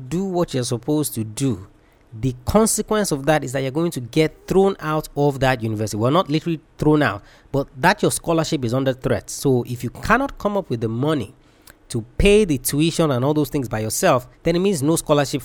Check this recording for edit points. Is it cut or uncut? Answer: cut